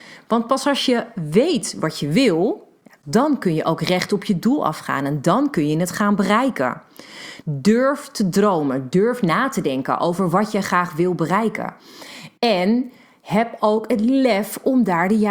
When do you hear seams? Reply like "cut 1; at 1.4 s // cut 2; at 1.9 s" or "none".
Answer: cut 1; at 7.4 s